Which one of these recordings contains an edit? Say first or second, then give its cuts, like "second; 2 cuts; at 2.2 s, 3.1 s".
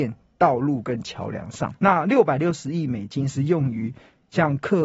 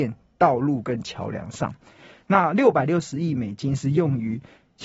first; 1 cut; at 1.8 s